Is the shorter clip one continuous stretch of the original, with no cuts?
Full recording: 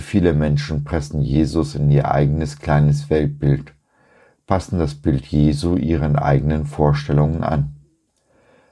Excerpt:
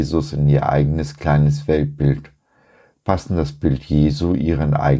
yes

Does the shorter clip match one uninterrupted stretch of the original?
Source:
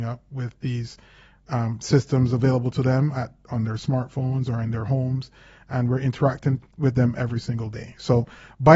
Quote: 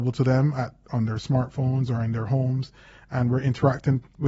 yes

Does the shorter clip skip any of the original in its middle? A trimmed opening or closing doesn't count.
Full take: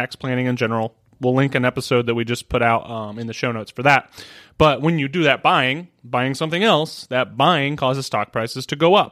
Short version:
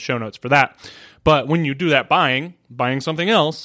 no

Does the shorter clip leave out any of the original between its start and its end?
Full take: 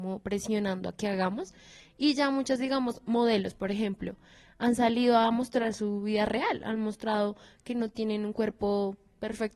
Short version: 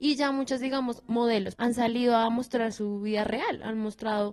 yes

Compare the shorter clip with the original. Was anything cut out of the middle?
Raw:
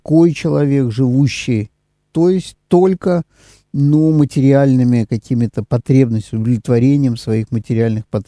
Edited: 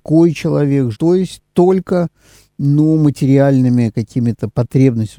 yes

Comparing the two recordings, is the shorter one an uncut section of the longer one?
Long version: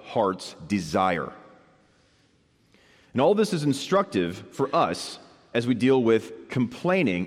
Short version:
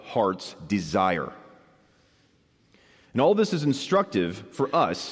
yes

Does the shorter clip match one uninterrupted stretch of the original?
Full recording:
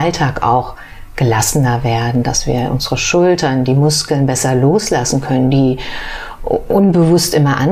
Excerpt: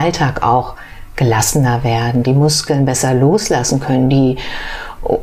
no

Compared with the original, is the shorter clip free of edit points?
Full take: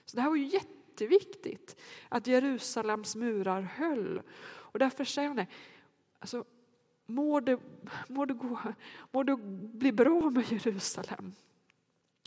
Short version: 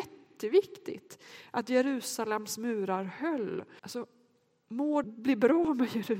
no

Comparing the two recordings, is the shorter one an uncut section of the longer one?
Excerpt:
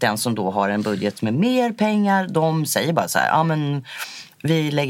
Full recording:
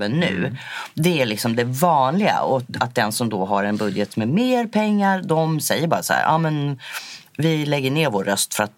yes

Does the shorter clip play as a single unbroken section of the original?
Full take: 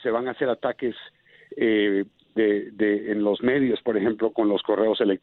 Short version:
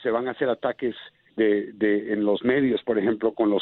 no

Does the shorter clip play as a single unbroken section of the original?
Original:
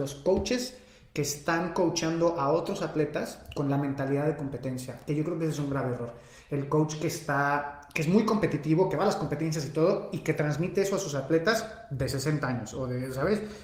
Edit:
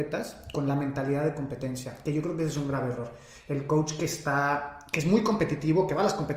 yes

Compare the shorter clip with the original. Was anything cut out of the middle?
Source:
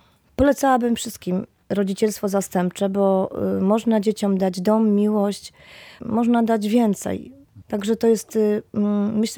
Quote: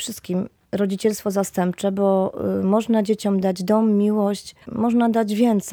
yes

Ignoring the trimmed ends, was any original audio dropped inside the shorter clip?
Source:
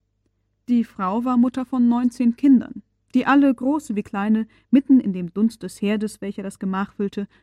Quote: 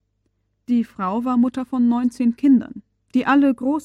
no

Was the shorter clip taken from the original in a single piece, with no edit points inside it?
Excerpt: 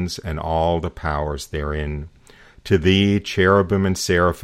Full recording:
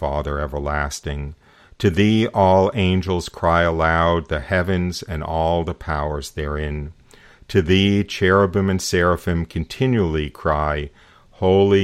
yes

